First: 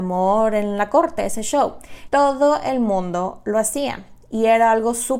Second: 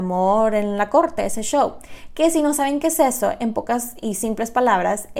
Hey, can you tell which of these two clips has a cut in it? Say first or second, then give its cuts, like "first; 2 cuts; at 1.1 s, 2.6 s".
first; 1 cut; at 2.1 s